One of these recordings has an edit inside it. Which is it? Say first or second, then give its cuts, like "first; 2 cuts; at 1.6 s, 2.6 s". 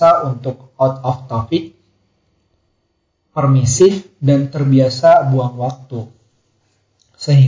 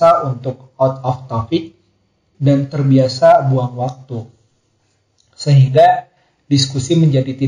second; 1 cut; at 2.3 s